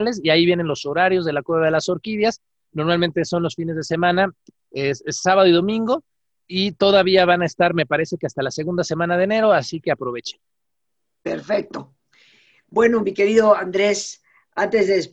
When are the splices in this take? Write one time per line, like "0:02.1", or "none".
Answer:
0:04.6